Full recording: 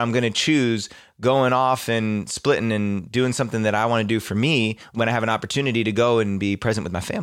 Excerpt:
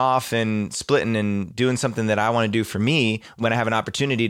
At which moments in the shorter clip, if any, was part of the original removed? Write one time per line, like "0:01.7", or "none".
none